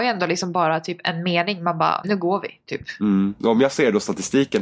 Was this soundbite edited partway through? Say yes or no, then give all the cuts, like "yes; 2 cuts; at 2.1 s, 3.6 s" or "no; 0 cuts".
yes; 1 cut; at 2.0 s